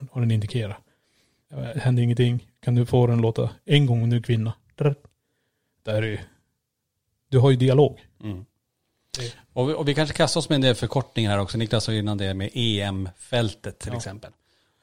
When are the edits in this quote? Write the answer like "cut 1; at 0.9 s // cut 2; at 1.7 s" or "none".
cut 1; at 1.4 s